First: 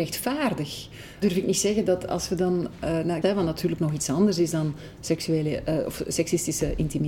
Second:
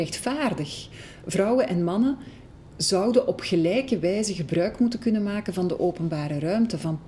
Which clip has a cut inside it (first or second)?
first